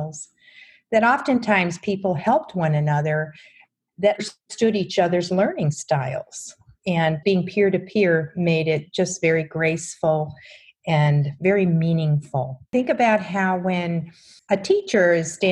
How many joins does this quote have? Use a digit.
1